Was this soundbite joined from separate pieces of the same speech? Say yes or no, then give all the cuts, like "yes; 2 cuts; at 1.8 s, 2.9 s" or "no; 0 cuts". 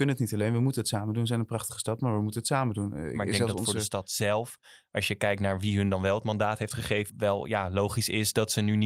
yes; 1 cut; at 7.1 s